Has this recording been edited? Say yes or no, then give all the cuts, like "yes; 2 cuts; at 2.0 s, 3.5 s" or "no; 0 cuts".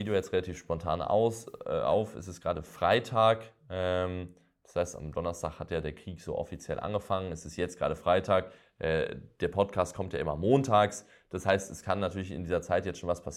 no; 0 cuts